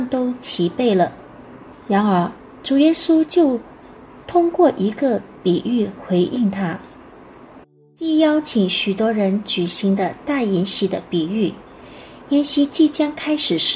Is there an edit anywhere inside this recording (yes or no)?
yes